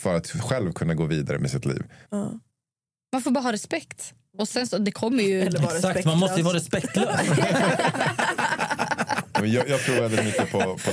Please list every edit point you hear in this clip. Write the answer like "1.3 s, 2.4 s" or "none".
2.1 s

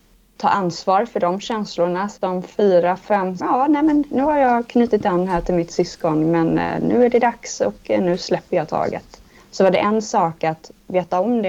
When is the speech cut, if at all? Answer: 3.4 s, 9.4 s

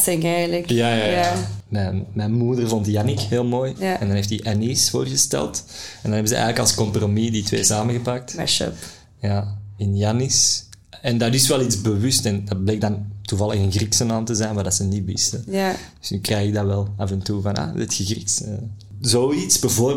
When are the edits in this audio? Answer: 3.7 s, 9.8 s

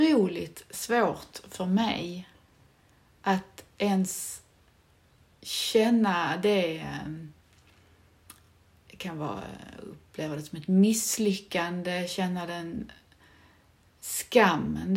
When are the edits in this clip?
none

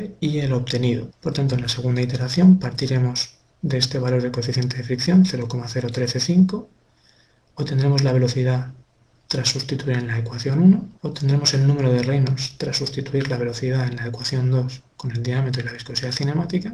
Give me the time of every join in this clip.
1.1 s, 11.0 s

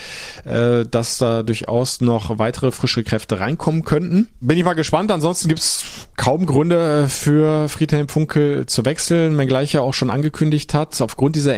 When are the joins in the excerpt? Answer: 4.4 s

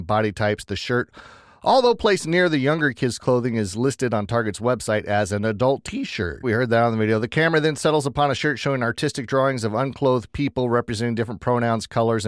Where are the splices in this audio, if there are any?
6.4 s

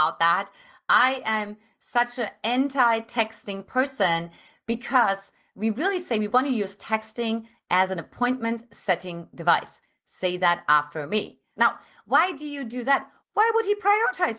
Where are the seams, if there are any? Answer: 11.6 s, 13.2 s

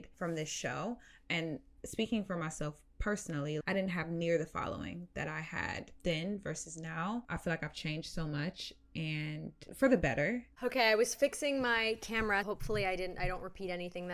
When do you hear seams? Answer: 3.6 s, 10.5 s, 12.4 s

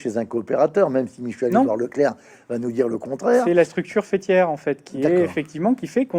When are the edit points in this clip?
none

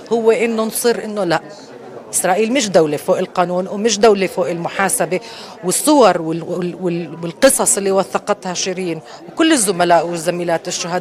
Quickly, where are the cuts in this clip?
none

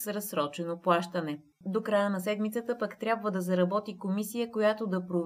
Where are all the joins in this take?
1.5 s

